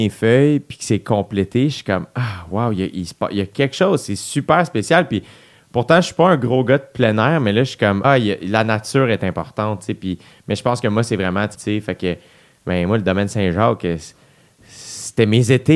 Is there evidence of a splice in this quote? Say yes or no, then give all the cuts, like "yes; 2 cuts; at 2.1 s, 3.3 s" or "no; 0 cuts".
yes; 2 cuts; at 8.0 s, 11.5 s